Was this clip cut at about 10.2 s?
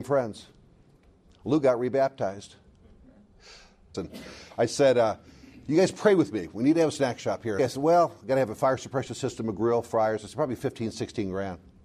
no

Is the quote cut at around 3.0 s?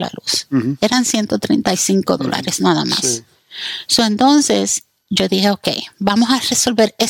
no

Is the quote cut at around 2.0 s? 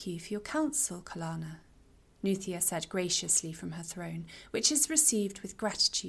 no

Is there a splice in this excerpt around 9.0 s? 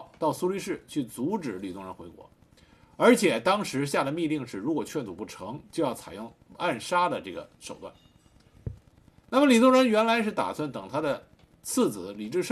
no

